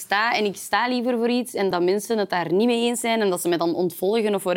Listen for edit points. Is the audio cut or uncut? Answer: cut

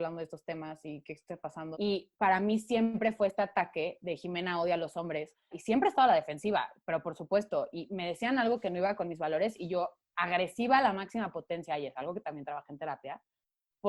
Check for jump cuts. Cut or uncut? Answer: cut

